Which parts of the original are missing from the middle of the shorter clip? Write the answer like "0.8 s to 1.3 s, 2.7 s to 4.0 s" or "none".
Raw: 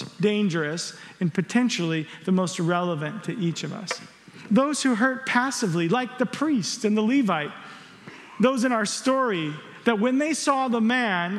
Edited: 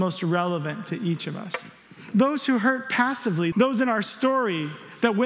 5.9 s to 8.4 s